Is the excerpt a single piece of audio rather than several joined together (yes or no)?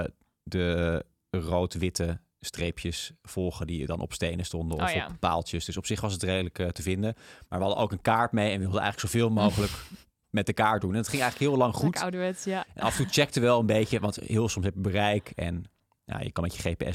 yes